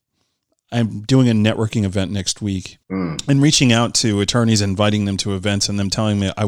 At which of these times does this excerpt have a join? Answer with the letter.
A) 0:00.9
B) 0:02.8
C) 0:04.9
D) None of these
B